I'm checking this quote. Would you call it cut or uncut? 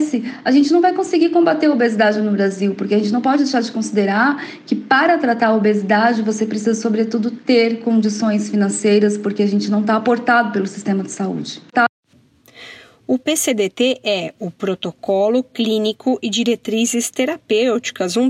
uncut